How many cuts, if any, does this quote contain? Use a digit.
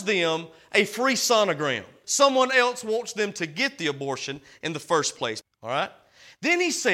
2